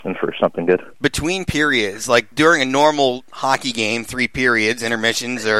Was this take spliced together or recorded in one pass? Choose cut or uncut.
cut